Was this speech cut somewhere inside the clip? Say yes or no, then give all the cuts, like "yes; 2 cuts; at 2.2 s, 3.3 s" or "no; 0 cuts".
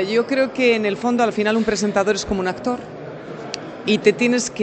no; 0 cuts